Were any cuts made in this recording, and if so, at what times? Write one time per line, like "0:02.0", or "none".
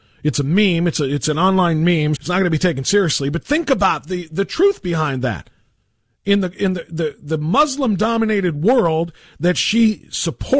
0:02.2